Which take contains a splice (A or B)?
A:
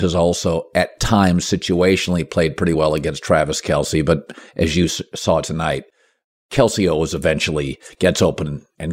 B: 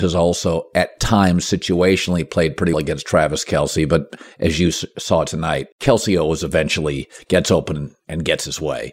B